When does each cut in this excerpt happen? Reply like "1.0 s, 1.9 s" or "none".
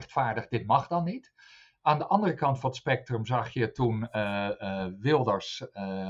none